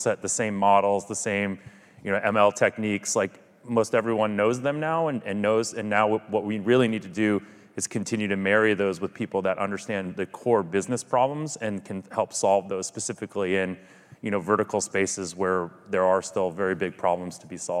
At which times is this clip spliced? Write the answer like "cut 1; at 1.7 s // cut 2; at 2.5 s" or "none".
none